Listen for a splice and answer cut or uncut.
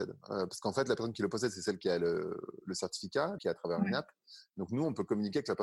cut